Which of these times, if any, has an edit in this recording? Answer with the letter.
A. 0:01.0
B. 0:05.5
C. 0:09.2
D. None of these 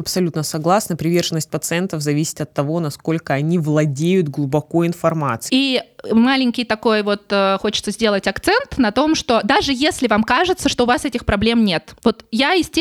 B